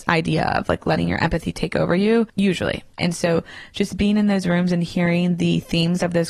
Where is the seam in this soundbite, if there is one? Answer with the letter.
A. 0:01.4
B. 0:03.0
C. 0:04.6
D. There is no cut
B